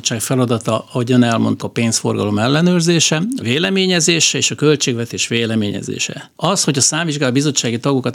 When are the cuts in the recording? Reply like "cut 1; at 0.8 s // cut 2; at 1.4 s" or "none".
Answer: cut 1; at 1.6 s // cut 2; at 3.4 s // cut 3; at 6.4 s